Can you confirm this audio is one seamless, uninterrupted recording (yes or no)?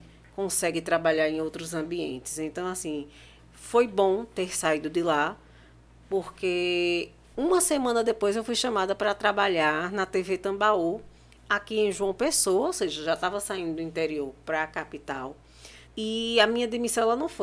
no